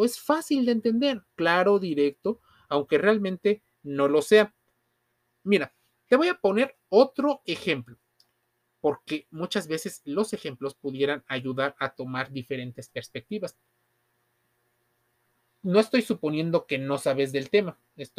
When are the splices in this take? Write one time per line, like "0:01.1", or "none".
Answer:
none